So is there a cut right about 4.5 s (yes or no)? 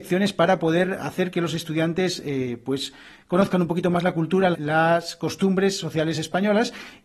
yes